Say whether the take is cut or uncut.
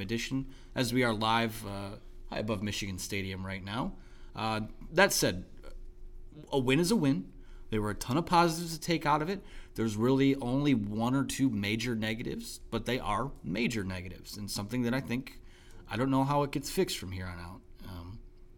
uncut